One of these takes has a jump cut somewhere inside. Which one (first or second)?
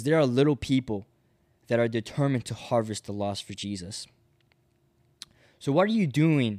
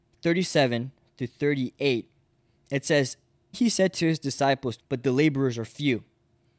second